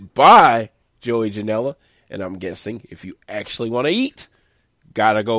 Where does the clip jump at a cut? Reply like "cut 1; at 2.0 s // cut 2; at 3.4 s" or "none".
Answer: none

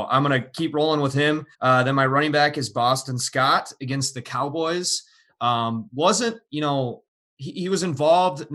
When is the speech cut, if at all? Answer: cut 1; at 1.5 s

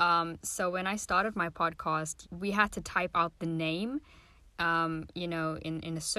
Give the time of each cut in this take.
cut 1; at 2.2 s

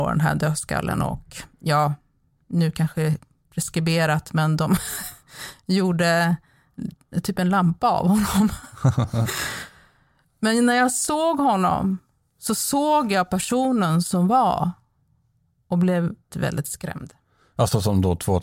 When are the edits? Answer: cut 1; at 16.3 s

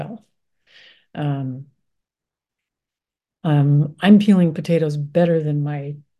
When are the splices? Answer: none

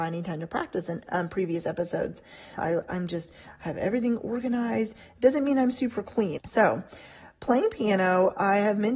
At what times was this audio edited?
cut 1; at 2.6 s // cut 2; at 6.4 s

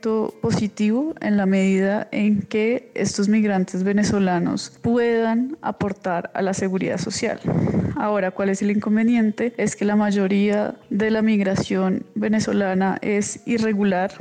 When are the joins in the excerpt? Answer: none

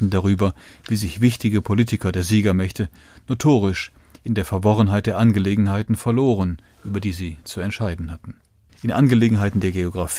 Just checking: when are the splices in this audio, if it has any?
cut 1; at 8.7 s

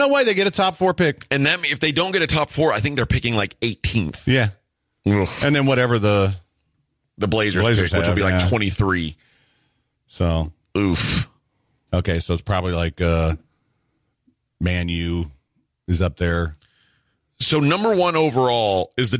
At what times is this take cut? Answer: cut 1; at 11.9 s

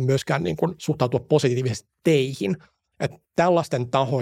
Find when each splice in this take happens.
cut 1; at 2.9 s

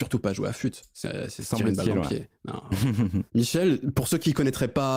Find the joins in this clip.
cut 1; at 3.3 s

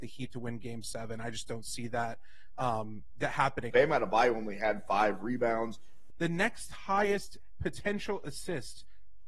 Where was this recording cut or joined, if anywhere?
cut 1; at 3.7 s // cut 2; at 6.1 s

